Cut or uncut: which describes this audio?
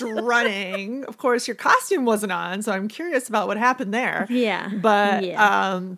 uncut